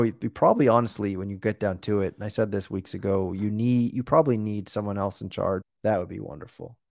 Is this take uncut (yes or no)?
no